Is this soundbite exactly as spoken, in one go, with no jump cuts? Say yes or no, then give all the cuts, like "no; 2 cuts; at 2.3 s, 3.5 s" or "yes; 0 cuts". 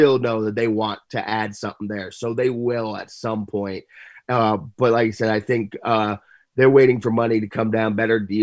yes; 0 cuts